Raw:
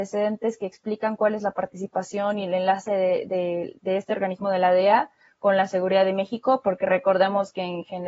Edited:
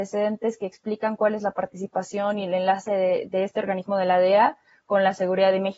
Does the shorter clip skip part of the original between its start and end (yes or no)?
yes